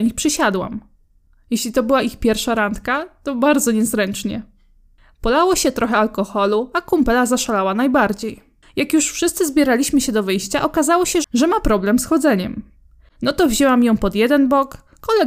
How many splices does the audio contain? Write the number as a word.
one